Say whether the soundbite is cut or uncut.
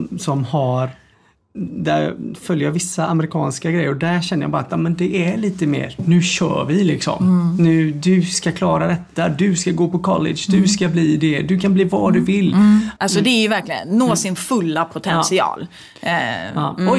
cut